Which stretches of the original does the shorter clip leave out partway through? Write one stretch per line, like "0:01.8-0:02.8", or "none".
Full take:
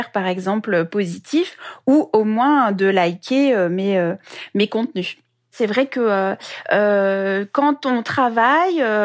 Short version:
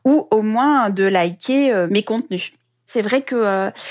0:03.7-0:04.5